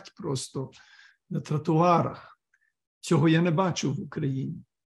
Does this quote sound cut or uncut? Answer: uncut